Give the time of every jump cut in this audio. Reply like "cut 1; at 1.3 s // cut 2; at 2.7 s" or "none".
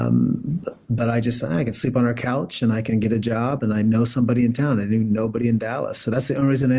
none